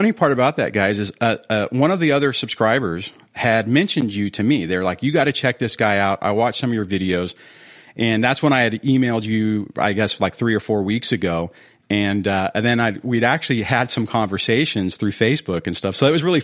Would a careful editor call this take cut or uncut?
uncut